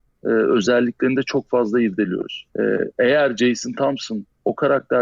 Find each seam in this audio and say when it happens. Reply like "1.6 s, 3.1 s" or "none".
2.5 s